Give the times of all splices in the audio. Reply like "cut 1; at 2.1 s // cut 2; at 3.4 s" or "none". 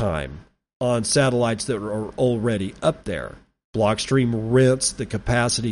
cut 1; at 3.6 s